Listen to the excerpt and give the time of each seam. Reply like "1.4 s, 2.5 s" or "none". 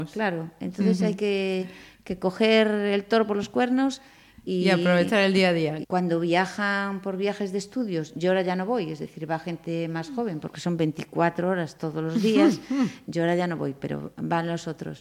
5.8 s, 13.0 s